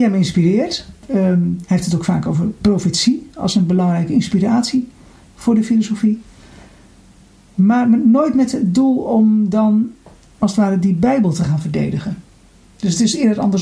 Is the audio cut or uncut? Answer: uncut